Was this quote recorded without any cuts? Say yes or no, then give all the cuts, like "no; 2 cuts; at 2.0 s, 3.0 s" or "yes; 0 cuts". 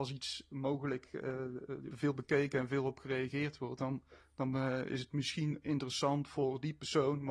no; 1 cut; at 1.9 s